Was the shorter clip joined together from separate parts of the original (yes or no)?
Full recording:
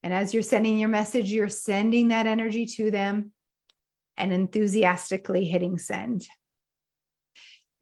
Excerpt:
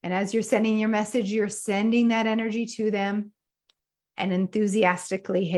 no